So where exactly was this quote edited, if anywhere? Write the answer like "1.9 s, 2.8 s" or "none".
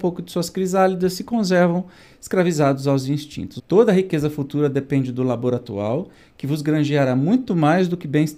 3.6 s